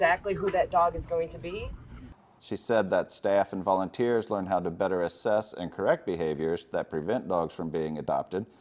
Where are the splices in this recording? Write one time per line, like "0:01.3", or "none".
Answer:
0:02.4